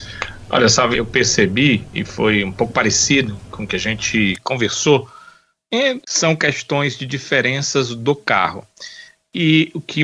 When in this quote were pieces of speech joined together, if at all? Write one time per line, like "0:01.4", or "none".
0:00.9
0:06.0